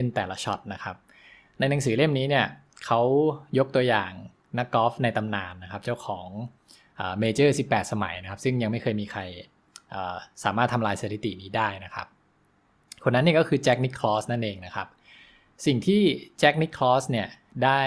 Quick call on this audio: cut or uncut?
uncut